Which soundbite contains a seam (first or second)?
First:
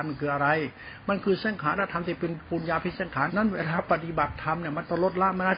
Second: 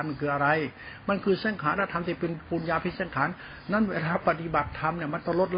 first